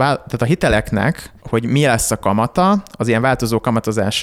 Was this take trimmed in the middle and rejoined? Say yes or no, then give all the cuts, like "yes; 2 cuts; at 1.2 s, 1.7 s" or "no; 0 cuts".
yes; 1 cut; at 1.4 s